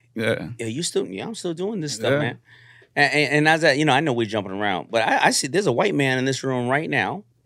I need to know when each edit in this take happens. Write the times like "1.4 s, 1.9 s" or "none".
none